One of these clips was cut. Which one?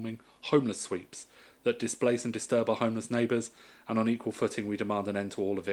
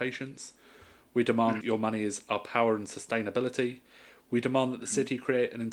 second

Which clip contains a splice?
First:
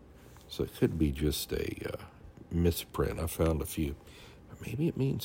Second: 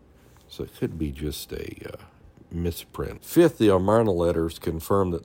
second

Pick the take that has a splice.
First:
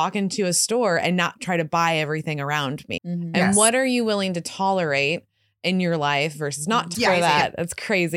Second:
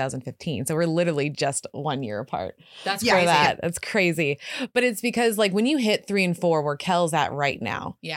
first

